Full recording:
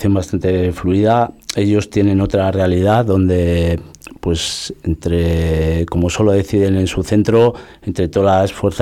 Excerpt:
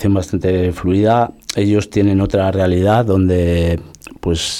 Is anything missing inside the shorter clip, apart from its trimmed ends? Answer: no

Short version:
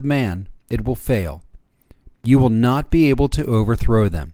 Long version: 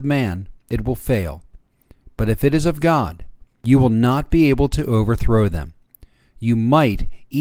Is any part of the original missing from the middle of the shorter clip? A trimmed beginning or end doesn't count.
yes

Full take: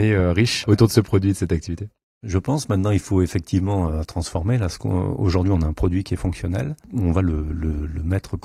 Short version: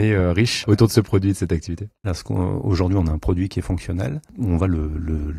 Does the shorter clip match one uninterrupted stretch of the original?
no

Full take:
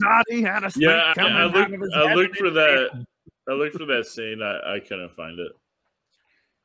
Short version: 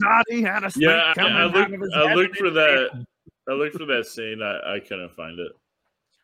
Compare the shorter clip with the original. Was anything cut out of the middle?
no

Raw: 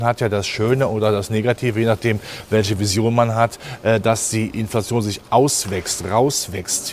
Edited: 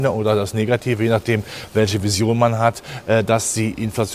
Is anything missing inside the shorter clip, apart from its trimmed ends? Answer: no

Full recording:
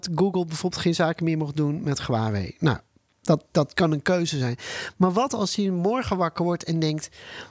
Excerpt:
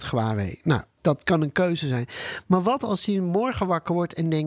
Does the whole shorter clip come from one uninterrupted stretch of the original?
no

